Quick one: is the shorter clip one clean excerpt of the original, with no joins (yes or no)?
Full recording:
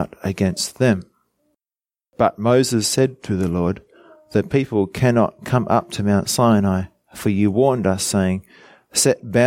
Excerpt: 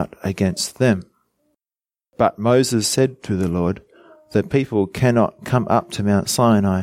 yes